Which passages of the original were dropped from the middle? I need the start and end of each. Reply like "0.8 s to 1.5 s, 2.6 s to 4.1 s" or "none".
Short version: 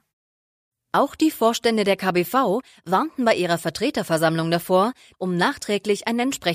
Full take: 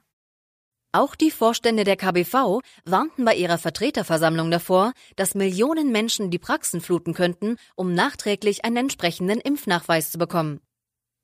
5.1 s to 7.7 s